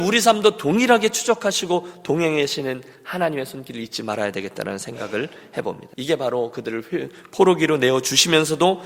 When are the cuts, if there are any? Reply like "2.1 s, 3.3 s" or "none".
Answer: 5.9 s